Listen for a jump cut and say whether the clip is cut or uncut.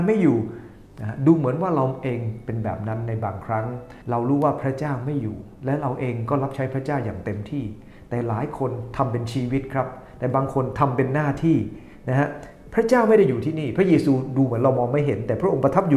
cut